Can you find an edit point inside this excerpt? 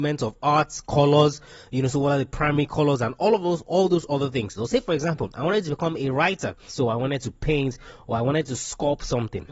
yes; 2 cuts; at 4.6 s, 6.7 s

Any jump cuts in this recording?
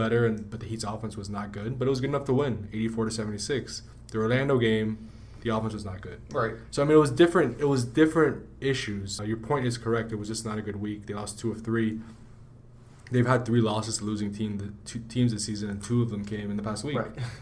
yes; 1 cut; at 9.2 s

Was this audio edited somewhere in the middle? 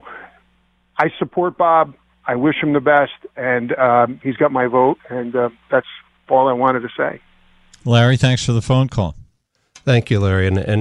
no; 0 cuts

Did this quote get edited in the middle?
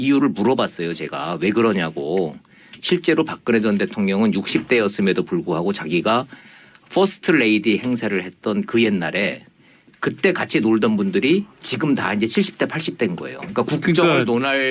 no; 0 cuts

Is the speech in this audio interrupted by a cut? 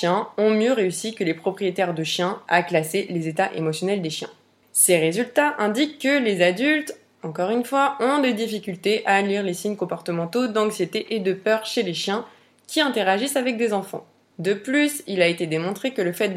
no; 0 cuts

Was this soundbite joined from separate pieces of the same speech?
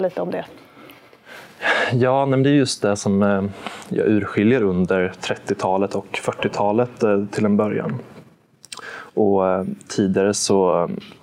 no; 0 cuts

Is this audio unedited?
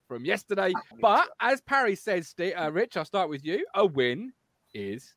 no; 1 cut; at 0.9 s

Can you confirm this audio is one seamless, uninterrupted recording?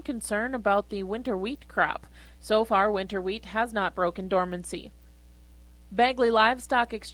no; 1 cut; at 2.4 s

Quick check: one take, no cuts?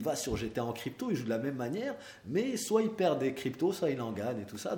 yes; 0 cuts

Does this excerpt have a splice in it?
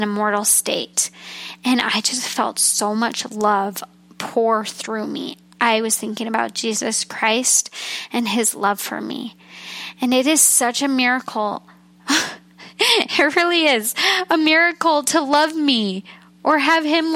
no; 0 cuts

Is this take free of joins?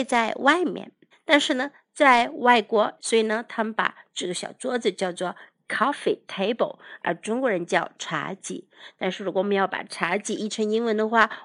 no; 2 cuts; at 1.1 s, 3.0 s

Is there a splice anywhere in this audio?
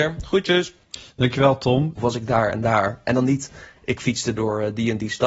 yes; 1 cut; at 2.0 s

